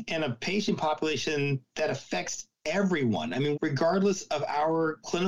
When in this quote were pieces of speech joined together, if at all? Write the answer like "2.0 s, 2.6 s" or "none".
3.5 s